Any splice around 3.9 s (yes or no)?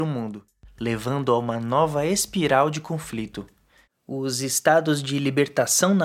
yes